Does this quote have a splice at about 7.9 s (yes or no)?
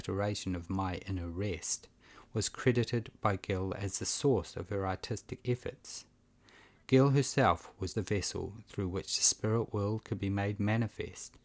yes